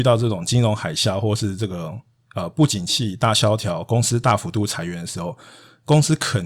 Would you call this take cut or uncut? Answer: uncut